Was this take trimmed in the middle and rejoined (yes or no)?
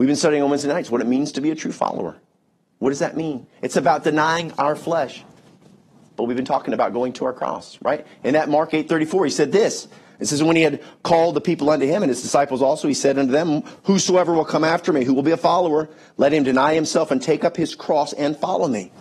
no